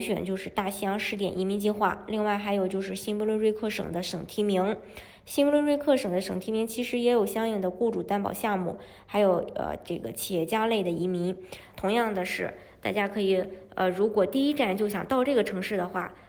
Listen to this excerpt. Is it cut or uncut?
cut